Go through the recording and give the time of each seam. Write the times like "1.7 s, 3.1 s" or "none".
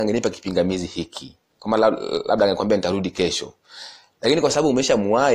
none